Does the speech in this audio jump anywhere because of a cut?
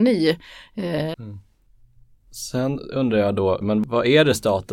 yes; 2 cuts; at 1.1 s, 3.6 s

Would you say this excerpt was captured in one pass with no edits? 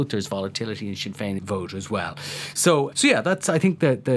no; 2 cuts; at 1.4 s, 2.9 s

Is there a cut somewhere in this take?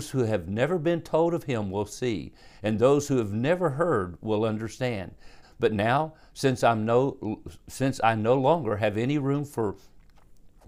yes; 1 cut; at 5.4 s

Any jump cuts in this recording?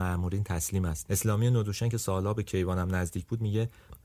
yes; 1 cut; at 1.1 s

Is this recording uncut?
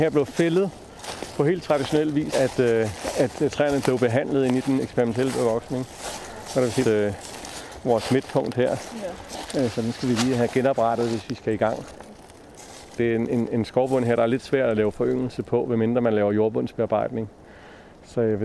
no; 3 cuts; at 2.3 s, 6.8 s, 13.0 s

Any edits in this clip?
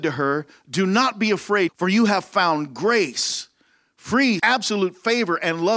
yes; 2 cuts; at 1.7 s, 4.4 s

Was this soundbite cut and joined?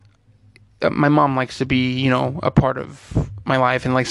no; 0 cuts

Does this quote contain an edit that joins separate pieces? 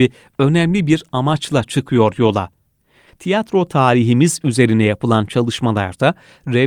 yes; 1 cut; at 3.1 s

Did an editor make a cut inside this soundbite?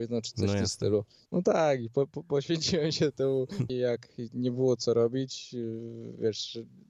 yes; 2 cuts; at 1.3 s, 3.7 s

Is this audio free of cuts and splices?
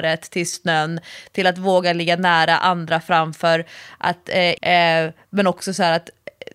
no; 1 cut; at 4.6 s

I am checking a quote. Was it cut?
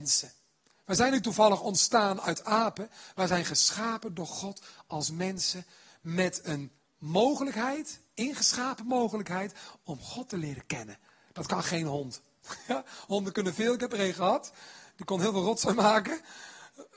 no; 0 cuts

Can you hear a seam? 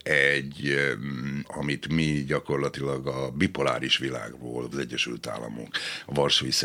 yes; 2 cuts; at 1.4 s, 4.7 s

